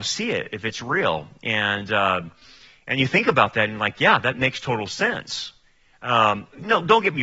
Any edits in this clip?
no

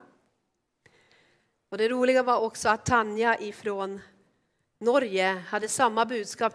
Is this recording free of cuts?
yes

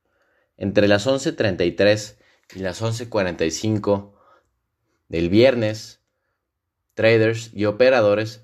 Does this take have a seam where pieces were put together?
no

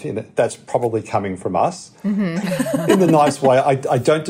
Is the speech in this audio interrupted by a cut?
yes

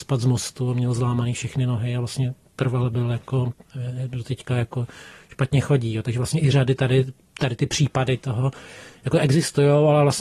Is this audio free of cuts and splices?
yes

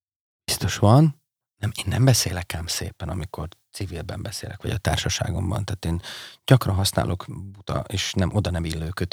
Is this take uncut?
yes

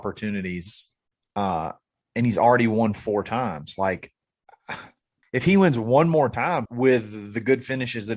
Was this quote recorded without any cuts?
no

